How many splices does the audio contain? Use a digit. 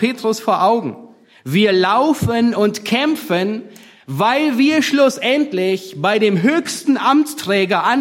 0